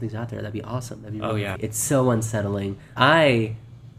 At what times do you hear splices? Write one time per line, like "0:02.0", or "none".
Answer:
0:01.6
0:03.0